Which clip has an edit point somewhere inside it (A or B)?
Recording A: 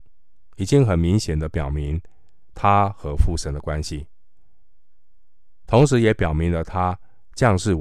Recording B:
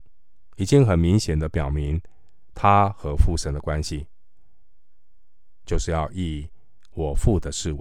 B